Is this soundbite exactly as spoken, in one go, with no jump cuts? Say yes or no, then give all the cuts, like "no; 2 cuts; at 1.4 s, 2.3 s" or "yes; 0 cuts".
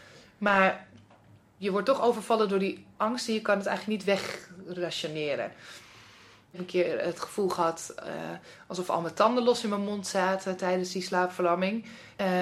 yes; 0 cuts